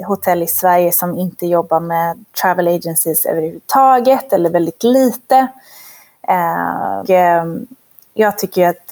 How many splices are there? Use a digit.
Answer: 1